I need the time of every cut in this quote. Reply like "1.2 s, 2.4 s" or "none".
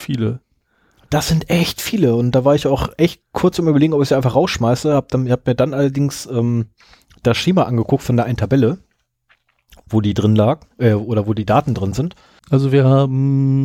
10.7 s, 12.4 s